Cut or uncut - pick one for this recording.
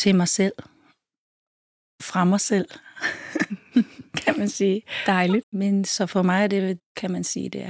cut